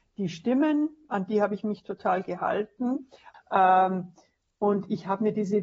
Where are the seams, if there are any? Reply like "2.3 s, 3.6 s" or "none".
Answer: 3.3 s